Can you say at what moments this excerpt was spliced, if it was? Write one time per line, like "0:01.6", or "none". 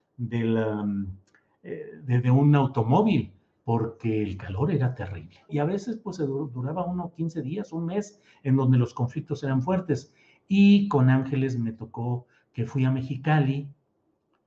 0:05.5